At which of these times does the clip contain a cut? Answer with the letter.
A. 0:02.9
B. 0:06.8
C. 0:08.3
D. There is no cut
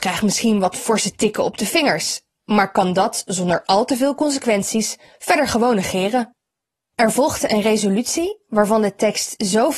B